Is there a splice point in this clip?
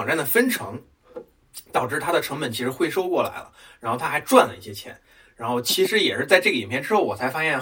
no; 0 cuts

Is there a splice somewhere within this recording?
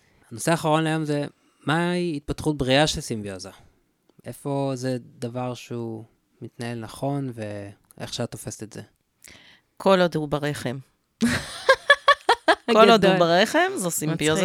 no; 0 cuts

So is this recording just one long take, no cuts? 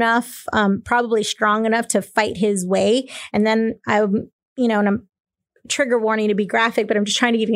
yes; 0 cuts

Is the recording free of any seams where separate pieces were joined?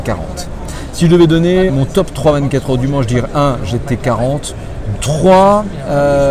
no; 2 cuts; at 1.7 s, 4.9 s

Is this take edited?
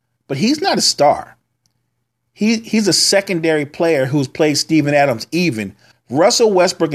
yes; 1 cut; at 5.9 s

